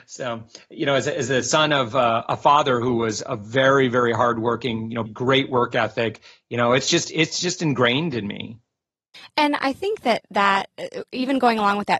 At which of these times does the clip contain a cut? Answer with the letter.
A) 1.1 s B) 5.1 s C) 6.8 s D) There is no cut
B